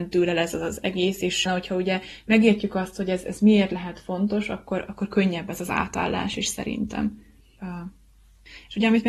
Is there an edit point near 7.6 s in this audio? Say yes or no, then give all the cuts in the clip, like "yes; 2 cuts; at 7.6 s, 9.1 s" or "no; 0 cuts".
yes; 2 cuts; at 1.5 s, 7.6 s